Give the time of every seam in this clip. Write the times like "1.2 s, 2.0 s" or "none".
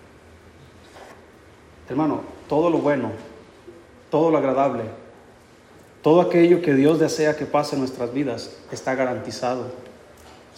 none